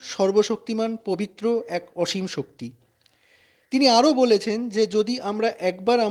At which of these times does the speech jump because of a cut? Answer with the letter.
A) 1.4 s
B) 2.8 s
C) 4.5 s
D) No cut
D